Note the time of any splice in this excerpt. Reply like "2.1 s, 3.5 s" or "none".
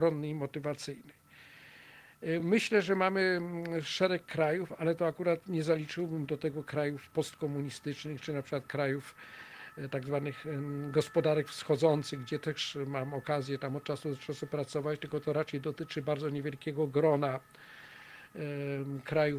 none